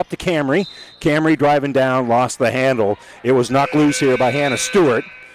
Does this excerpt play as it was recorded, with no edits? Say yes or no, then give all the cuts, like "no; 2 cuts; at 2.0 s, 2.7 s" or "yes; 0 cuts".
yes; 0 cuts